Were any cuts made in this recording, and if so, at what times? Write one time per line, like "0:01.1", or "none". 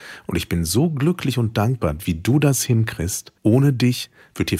0:03.4

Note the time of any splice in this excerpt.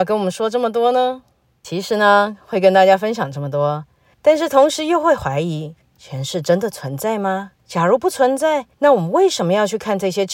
0:04.1
0:07.6
0:08.7

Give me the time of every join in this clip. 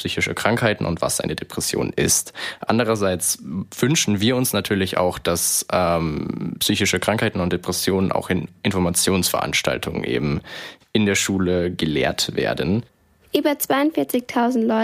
none

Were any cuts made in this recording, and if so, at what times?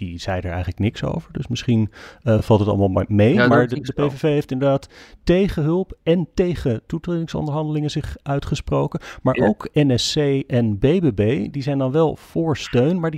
none

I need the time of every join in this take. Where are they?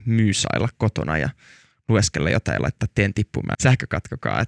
0:03.5

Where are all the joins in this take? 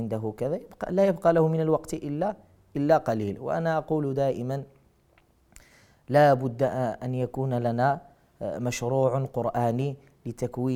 none

